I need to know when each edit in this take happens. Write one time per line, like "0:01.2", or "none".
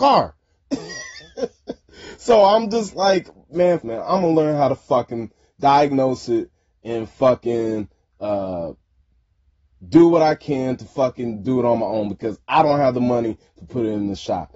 0:03.8

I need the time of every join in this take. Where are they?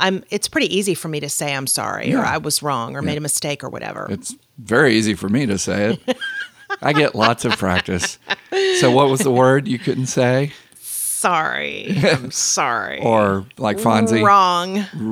none

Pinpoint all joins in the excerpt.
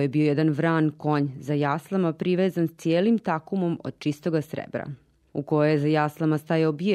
0:05.3

